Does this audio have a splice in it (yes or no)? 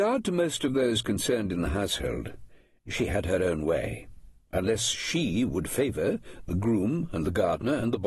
no